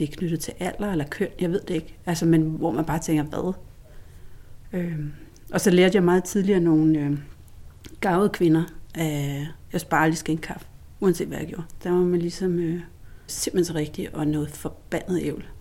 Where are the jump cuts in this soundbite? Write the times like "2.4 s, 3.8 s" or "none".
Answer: 11.8 s, 13.3 s

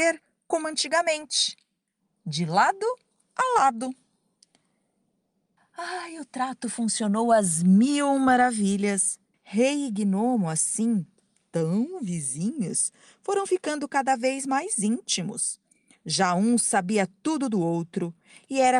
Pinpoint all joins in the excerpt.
5.6 s, 9.3 s

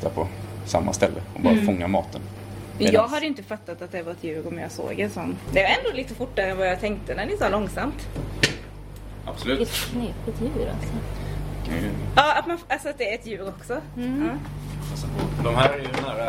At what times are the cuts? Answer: 5.5 s

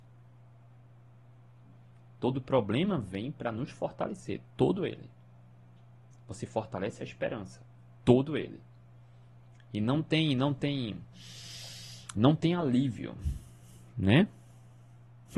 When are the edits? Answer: 6.1 s

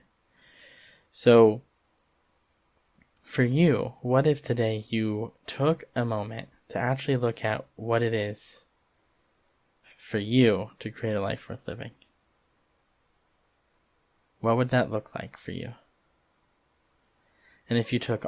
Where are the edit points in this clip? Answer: none

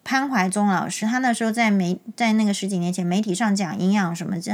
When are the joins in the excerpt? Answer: 1.0 s

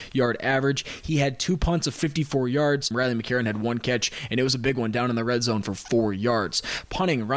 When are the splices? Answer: 2.9 s

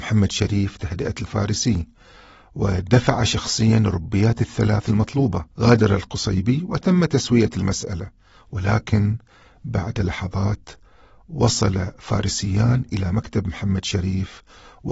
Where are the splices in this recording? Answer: 5.5 s

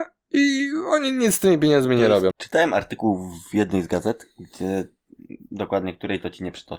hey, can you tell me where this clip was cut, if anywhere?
2.3 s

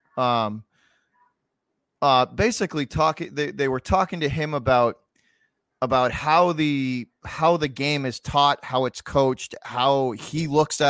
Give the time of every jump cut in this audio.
none

